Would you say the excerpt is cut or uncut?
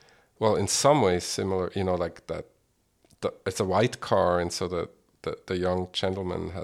uncut